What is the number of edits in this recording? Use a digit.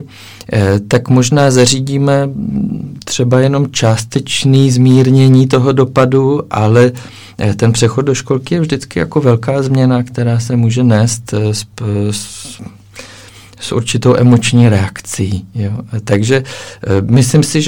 0